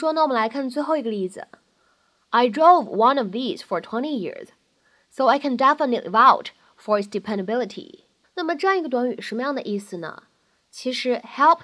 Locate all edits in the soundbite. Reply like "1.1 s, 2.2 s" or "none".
8.2 s